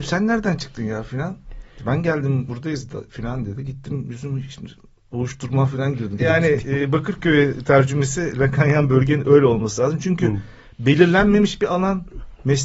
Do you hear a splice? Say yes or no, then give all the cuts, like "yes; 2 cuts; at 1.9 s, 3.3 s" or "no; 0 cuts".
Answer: yes; 1 cut; at 6.2 s